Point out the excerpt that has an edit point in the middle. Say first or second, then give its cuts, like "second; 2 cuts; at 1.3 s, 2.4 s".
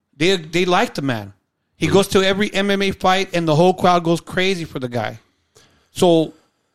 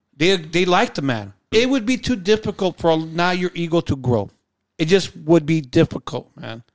second; 1 cut; at 1.5 s